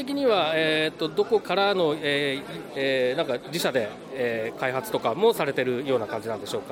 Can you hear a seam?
yes; 2 cuts; at 1.4 s, 2.7 s

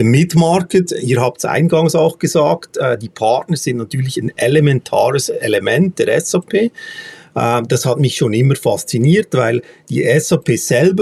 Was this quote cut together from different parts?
no; 0 cuts

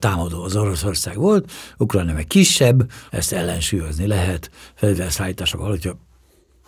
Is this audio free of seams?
no; 1 cut; at 3.1 s

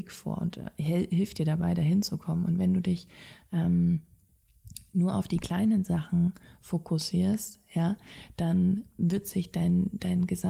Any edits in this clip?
no; 0 cuts

